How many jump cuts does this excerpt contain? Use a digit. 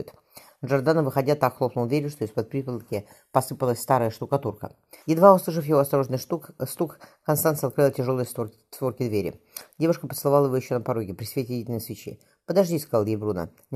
1